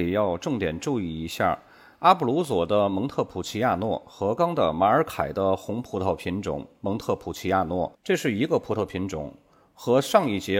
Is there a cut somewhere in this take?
yes; 1 cut; at 4.4 s

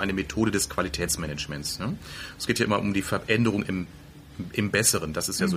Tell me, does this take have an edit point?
no; 0 cuts

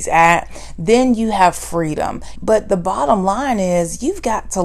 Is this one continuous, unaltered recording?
no; 1 cut; at 2.4 s

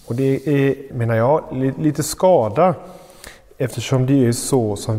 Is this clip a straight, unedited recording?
no; 1 cut; at 0.9 s

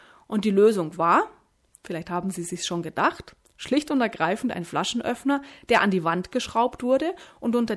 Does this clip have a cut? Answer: no; 0 cuts

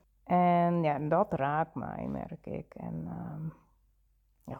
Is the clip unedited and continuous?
yes; 0 cuts

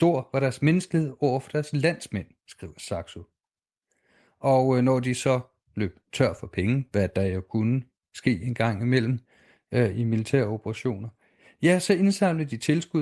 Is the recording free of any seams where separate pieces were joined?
yes; 0 cuts

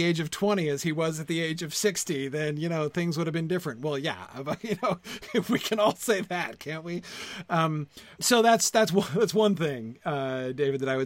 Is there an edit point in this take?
yes; 1 cut; at 8.2 s

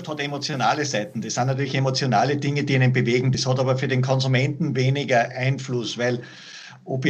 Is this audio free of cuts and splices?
yes; 0 cuts

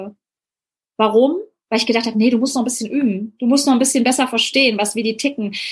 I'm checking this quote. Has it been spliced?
no; 0 cuts

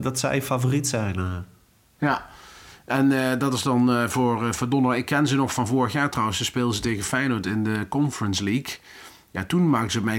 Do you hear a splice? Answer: no; 0 cuts

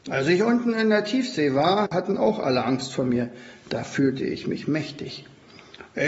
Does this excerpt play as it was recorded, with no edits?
no; 1 cut; at 1.8 s

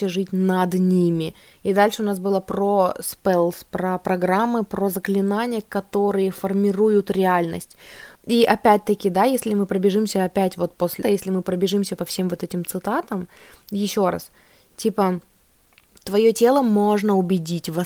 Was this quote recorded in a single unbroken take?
no; 2 cuts; at 8.2 s, 11.0 s

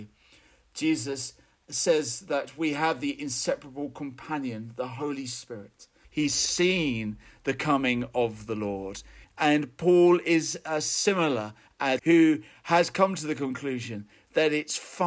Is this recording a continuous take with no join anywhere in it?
no; 3 cuts; at 6.0 s, 9.2 s, 12.0 s

